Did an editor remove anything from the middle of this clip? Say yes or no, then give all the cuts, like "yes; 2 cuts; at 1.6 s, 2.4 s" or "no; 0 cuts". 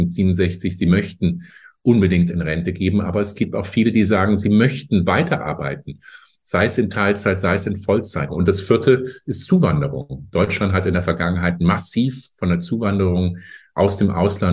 yes; 1 cut; at 8.3 s